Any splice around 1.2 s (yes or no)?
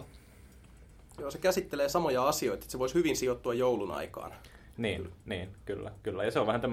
yes